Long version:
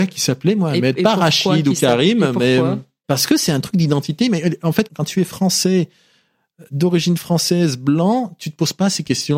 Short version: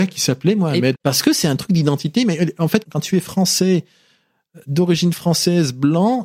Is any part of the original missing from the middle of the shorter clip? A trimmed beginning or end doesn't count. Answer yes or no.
yes